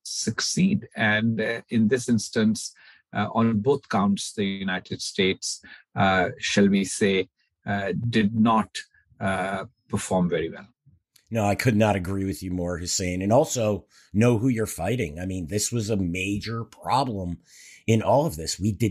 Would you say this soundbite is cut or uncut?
uncut